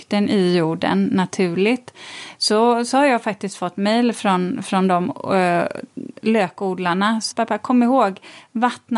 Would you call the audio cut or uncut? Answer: cut